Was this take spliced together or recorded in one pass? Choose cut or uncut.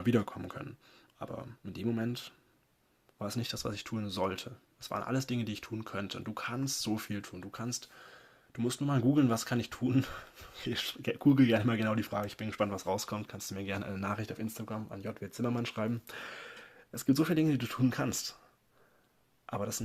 uncut